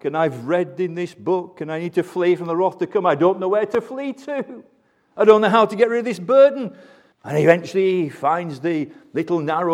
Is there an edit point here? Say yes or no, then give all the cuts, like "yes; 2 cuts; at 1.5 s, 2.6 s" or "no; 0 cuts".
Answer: yes; 1 cut; at 7.1 s